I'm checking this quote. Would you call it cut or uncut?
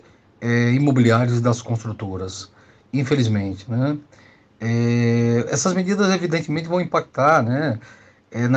cut